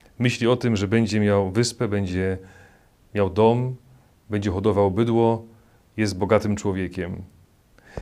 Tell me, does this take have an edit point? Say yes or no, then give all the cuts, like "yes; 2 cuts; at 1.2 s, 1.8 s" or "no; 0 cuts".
no; 0 cuts